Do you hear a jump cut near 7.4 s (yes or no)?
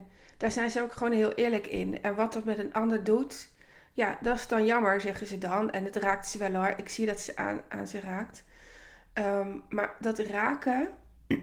no